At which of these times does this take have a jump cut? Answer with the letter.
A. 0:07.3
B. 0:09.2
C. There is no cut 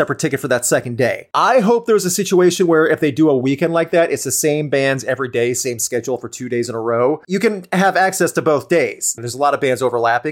B